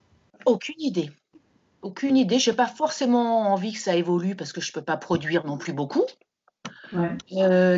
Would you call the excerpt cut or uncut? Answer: uncut